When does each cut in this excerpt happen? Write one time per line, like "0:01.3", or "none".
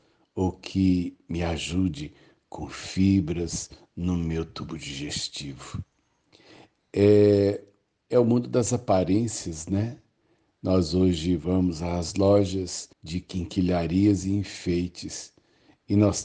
0:12.9